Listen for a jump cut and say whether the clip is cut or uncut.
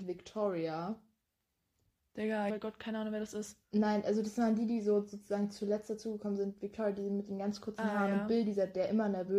cut